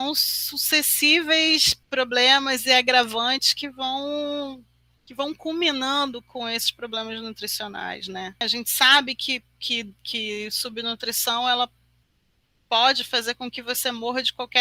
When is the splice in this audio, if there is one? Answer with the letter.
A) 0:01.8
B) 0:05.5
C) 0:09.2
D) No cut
A